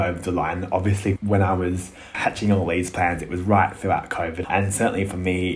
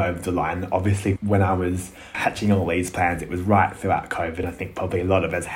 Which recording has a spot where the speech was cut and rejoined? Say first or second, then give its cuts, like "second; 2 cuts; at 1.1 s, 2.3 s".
first; 1 cut; at 4.4 s